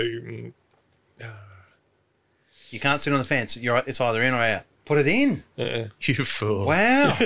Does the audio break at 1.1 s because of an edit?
no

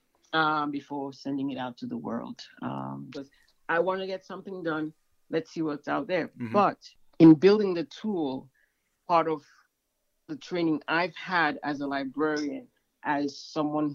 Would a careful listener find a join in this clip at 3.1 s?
yes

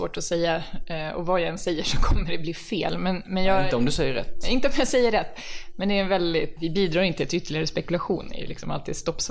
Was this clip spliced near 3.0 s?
no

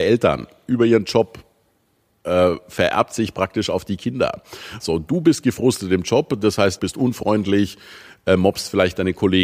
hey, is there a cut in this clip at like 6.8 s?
yes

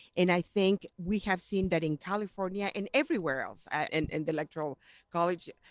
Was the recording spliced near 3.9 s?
yes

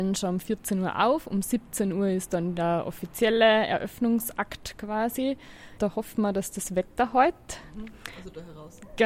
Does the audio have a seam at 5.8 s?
yes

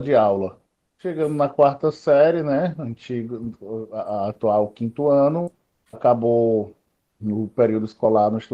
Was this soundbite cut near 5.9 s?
yes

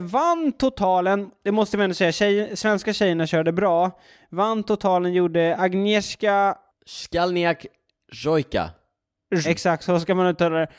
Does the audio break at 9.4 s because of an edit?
yes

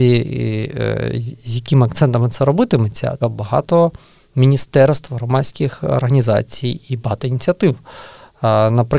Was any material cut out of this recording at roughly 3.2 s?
yes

